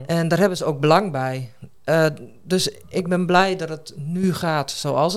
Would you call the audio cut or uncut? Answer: uncut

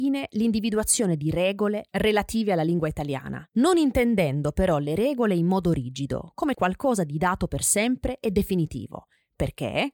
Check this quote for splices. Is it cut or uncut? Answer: cut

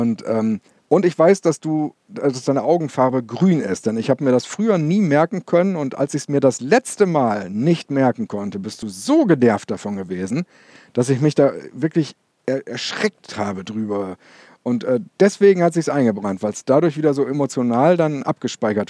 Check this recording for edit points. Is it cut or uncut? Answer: uncut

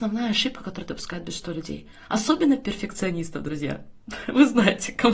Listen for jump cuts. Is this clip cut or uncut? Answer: uncut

